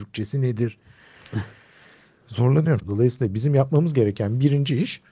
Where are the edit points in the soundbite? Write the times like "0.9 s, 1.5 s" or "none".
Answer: 2.8 s